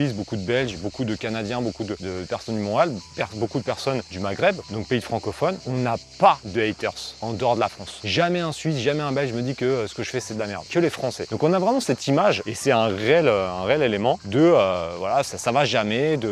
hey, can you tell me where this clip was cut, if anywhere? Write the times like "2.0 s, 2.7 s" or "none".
none